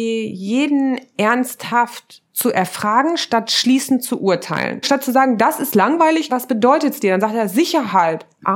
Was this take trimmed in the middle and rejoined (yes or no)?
yes